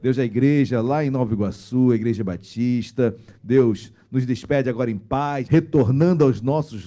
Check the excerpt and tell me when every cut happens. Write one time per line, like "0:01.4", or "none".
0:03.3
0:05.4